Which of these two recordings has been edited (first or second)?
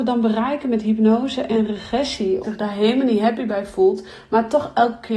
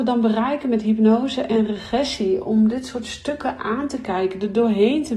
first